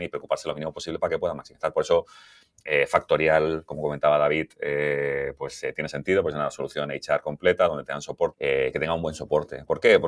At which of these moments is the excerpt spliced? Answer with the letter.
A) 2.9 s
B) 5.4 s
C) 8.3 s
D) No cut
C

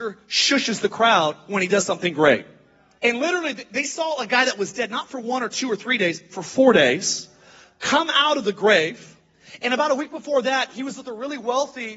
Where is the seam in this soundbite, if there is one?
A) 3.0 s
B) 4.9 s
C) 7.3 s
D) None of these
A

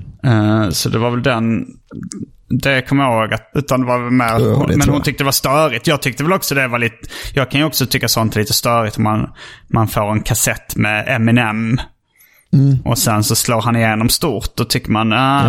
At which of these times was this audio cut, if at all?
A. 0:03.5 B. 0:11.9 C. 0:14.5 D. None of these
A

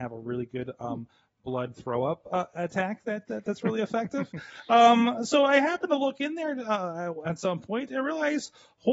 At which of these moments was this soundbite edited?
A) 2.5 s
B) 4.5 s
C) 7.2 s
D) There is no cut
D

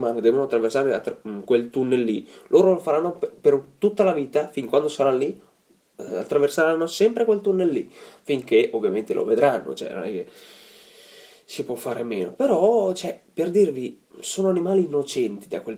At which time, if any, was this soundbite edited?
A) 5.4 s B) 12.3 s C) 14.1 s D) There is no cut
D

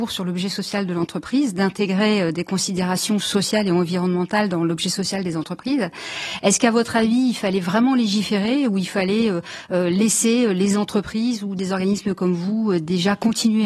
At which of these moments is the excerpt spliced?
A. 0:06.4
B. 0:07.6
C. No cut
C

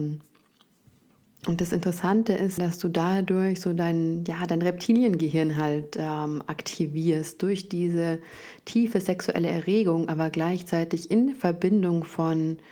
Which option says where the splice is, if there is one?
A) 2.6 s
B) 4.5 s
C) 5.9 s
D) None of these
A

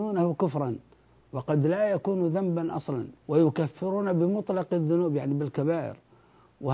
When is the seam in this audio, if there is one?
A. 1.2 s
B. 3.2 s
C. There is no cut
B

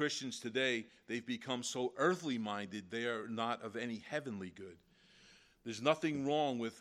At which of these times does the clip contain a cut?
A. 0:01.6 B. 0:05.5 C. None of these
C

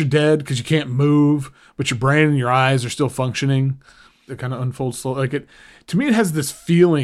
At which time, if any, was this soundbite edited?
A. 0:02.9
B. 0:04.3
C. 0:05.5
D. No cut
B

